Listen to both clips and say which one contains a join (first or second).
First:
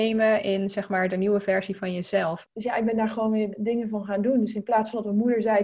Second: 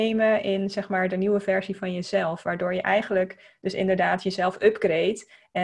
first